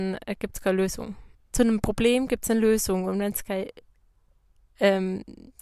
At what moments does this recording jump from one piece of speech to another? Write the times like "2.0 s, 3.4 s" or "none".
1.3 s